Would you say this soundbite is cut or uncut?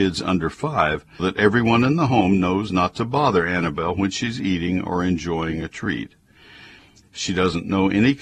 cut